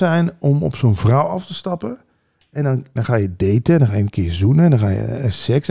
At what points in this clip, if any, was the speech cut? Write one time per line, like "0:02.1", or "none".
0:03.0